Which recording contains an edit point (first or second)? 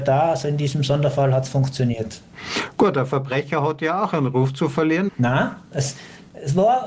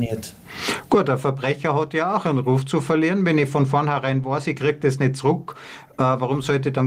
first